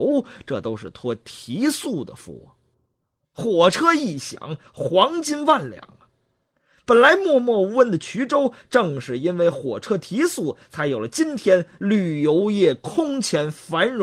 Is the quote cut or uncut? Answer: cut